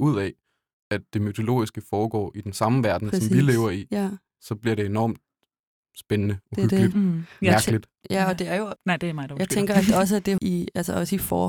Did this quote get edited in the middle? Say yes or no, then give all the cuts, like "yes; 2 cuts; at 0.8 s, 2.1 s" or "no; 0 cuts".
yes; 2 cuts; at 8.8 s, 10.4 s